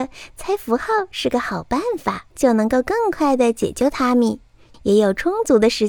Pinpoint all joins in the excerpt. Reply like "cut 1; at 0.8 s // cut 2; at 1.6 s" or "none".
cut 1; at 2.3 s // cut 2; at 4.7 s